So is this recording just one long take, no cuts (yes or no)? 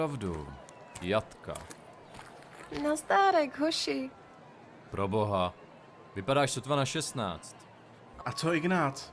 no